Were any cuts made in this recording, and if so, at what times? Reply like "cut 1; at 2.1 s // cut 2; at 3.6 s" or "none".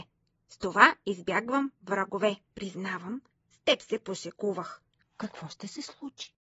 cut 1; at 2.4 s // cut 2; at 5.0 s